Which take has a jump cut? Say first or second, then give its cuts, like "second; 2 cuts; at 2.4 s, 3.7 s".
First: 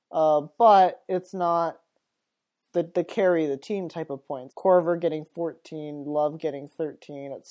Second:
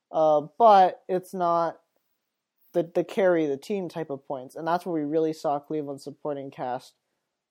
first; 1 cut; at 4.5 s